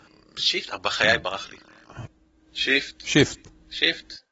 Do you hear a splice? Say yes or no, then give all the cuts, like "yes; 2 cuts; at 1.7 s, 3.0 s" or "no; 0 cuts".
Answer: no; 0 cuts